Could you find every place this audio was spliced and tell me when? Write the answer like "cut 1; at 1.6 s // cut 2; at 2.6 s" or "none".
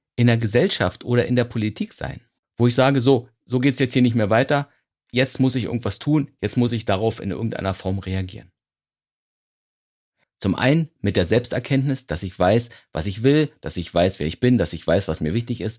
cut 1; at 10.2 s

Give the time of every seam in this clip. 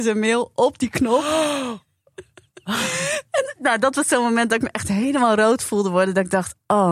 none

